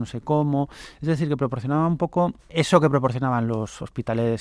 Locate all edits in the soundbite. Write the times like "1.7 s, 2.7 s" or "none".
2.4 s